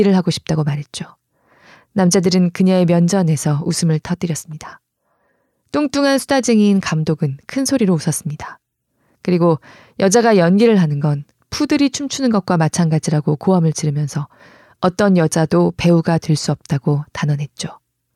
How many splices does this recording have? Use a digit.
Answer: 0